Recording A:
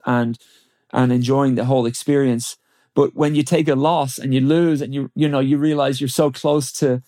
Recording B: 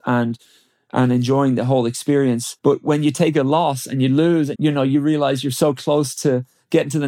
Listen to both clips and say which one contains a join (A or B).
B